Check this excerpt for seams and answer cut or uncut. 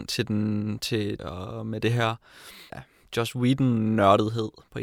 cut